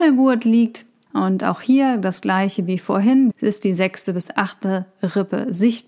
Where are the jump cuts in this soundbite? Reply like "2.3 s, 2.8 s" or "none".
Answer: 1.1 s, 3.3 s